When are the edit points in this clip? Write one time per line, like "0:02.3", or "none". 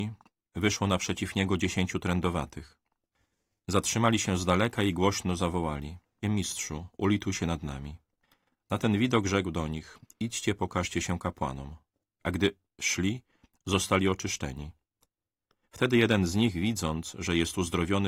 0:06.2